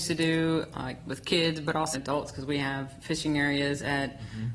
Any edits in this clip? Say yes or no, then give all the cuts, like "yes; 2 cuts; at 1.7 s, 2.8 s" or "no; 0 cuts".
yes; 1 cut; at 1.9 s